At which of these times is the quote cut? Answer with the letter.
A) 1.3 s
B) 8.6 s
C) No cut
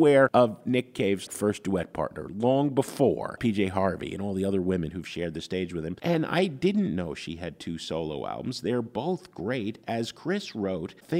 A